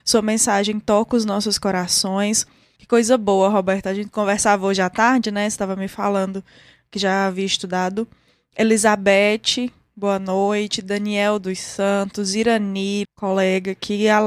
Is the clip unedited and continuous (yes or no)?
no